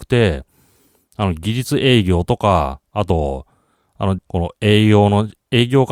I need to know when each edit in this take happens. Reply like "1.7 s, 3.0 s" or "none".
4.2 s